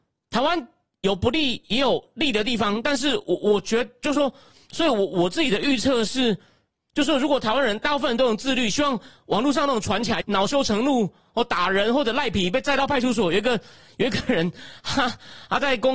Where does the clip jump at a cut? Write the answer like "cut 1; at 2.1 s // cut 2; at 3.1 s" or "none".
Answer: cut 1; at 10.2 s